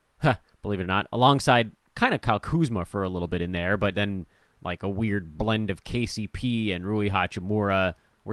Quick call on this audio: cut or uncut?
uncut